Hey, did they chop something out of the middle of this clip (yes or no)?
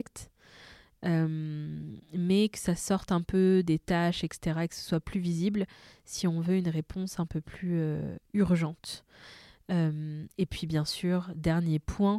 no